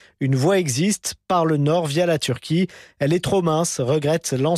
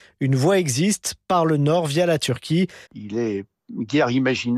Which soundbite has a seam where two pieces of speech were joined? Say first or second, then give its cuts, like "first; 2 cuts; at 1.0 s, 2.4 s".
second; 1 cut; at 2.9 s